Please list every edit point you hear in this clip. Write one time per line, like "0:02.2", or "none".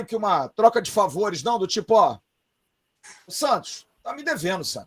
none